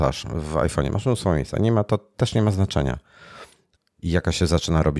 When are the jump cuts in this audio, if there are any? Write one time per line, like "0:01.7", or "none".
0:03.8